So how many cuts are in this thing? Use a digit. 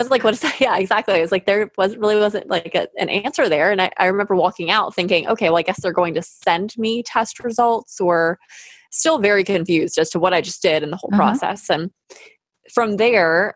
0